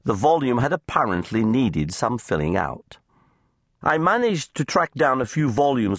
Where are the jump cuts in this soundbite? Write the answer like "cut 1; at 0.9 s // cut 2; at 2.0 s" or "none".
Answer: cut 1; at 3.8 s